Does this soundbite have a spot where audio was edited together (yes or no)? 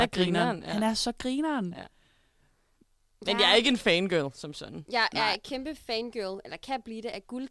no